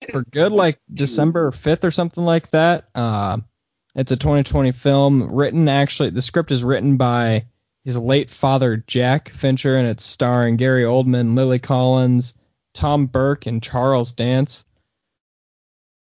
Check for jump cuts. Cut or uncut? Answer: uncut